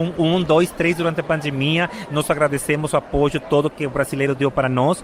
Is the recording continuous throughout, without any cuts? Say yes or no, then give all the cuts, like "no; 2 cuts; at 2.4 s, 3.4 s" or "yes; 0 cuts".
yes; 0 cuts